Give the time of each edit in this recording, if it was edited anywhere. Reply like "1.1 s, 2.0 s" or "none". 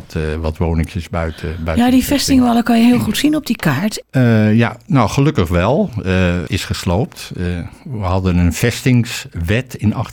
4.0 s, 6.5 s